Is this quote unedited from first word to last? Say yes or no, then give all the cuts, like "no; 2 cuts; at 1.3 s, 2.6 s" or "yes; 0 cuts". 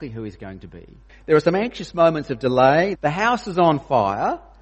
no; 2 cuts; at 1.1 s, 3.0 s